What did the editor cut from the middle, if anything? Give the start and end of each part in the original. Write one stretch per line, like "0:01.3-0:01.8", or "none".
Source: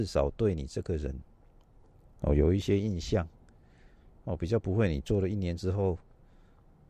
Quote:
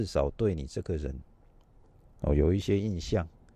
none